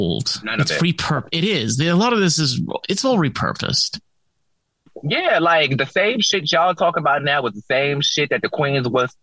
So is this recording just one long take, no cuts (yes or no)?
yes